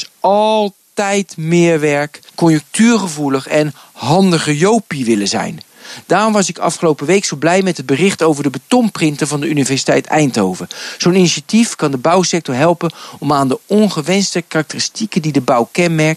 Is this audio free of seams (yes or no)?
no